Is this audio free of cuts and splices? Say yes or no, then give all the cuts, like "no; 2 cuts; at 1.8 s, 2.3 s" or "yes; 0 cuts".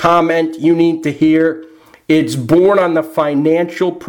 yes; 0 cuts